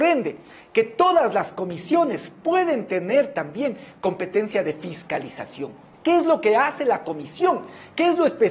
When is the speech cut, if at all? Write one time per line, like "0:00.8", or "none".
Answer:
0:05.9